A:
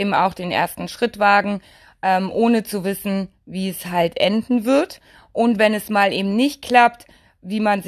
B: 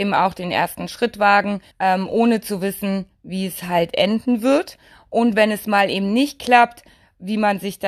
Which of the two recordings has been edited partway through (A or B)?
B